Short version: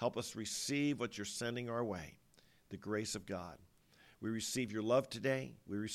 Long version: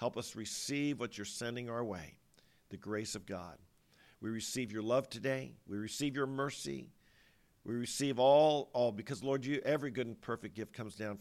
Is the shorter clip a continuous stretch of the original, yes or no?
yes